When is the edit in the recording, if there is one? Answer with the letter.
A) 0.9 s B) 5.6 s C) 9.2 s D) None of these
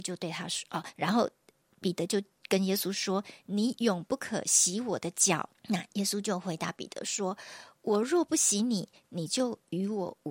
B